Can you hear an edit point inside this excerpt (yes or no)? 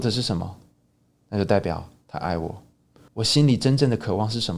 yes